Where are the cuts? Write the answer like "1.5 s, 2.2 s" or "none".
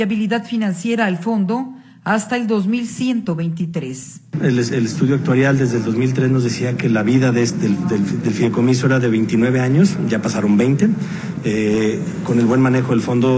8.2 s